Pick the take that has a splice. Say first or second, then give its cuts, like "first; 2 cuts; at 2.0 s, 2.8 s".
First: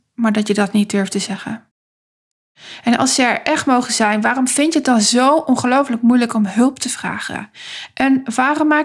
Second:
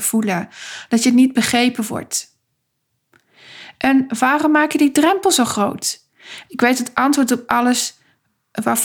second; 2 cuts; at 3.7 s, 6.4 s